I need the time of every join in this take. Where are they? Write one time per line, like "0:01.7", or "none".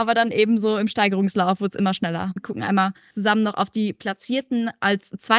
0:02.4